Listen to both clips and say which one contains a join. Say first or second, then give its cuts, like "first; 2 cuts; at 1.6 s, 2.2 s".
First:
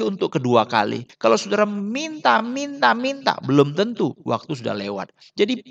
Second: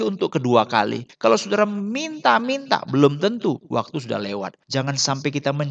second; 2 cuts; at 2.4 s, 4.6 s